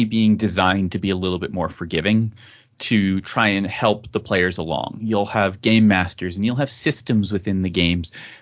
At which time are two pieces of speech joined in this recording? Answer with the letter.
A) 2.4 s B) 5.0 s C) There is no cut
C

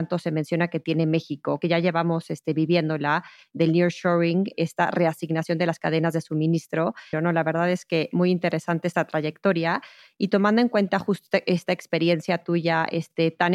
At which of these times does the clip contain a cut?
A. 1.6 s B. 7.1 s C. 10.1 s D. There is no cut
B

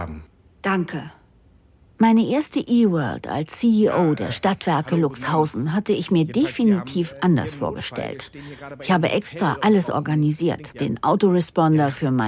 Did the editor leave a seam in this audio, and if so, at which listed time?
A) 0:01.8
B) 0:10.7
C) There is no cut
B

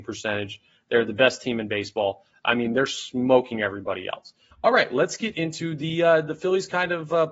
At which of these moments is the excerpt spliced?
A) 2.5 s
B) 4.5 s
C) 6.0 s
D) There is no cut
B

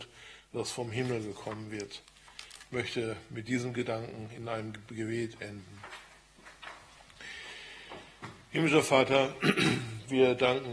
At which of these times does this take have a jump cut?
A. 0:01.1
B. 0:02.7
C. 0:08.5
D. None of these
D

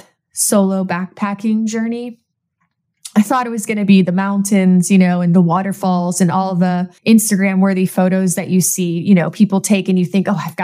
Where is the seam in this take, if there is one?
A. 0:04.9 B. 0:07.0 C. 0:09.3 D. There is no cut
B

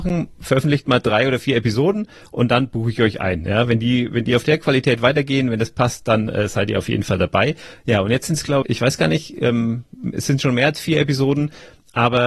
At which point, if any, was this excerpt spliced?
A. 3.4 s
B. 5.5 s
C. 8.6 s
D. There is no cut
C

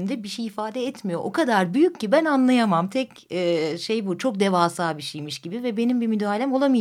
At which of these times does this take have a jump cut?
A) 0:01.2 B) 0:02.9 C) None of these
C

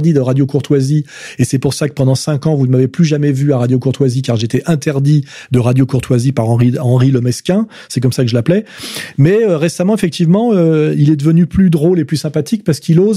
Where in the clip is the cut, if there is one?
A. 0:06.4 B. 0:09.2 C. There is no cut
C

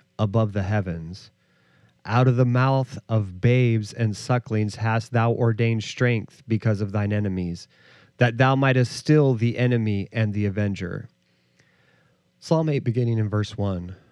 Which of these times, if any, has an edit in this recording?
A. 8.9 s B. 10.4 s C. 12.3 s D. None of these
C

